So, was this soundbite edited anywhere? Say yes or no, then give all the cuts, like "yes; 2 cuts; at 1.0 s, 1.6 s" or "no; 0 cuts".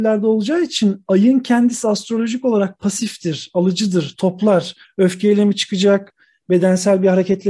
yes; 1 cut; at 4.8 s